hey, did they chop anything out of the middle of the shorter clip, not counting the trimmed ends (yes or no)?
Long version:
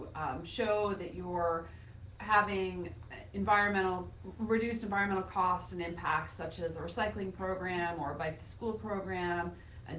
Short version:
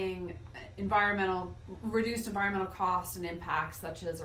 no